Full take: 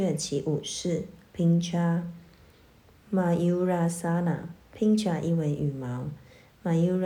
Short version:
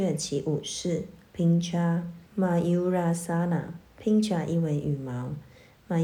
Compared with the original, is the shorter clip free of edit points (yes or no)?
no